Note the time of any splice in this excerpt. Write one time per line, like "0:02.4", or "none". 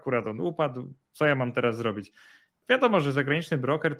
0:02.6